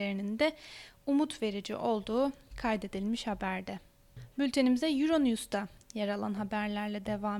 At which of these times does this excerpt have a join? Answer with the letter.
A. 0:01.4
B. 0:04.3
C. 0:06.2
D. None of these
D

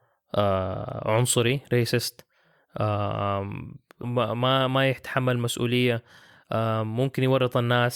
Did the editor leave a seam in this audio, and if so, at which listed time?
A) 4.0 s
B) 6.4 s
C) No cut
A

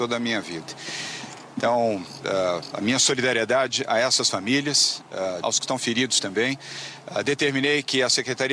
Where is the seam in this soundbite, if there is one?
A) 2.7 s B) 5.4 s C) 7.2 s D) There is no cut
B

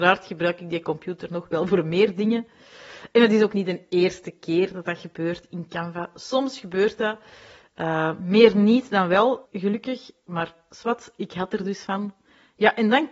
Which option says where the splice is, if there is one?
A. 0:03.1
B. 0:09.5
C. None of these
B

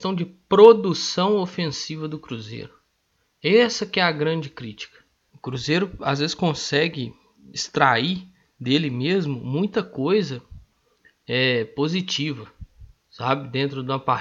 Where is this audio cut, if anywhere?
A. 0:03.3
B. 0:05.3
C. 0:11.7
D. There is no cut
B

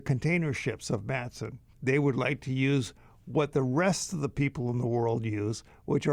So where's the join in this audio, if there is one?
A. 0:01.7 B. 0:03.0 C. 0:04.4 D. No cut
A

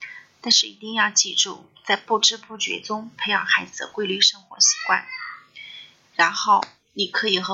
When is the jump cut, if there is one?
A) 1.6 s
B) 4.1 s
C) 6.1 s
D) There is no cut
C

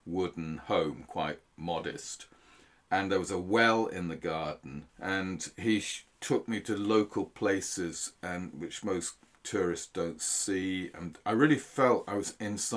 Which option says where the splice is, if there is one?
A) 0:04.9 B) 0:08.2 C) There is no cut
A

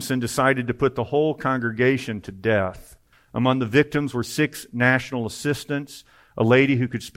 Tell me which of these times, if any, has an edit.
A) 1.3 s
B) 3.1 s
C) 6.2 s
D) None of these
B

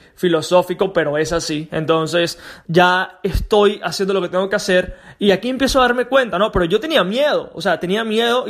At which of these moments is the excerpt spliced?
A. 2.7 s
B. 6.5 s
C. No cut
A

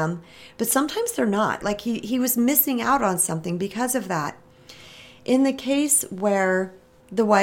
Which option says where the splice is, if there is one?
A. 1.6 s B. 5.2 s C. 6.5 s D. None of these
A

